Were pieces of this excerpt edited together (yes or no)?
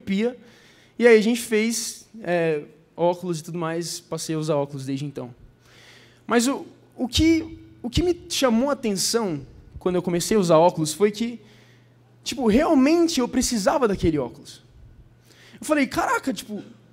no